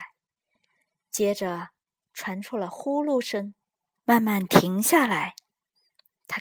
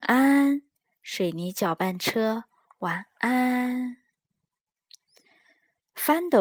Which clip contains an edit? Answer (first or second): first